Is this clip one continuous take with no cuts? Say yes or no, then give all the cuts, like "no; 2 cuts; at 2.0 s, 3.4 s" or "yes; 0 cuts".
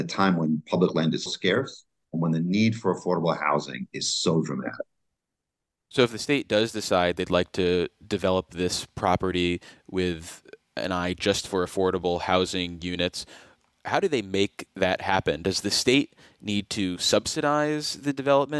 no; 1 cut; at 1.3 s